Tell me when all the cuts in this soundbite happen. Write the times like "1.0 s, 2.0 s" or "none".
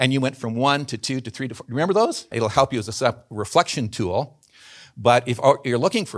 2.3 s